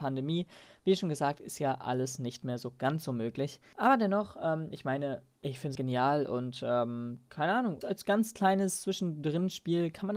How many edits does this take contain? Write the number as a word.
two